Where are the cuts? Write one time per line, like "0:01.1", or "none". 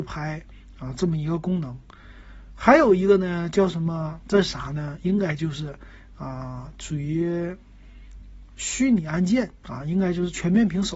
0:04.2